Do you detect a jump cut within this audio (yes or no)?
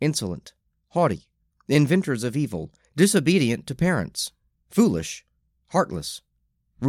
yes